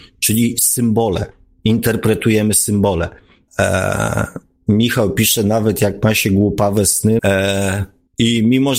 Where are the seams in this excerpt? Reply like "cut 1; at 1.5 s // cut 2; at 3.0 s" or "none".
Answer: cut 1; at 3.5 s // cut 2; at 7.2 s